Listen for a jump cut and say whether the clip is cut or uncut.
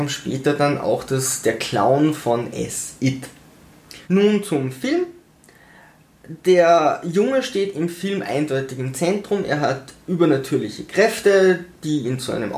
cut